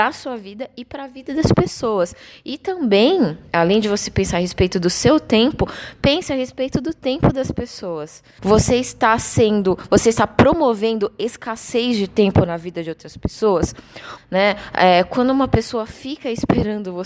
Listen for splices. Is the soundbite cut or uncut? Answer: cut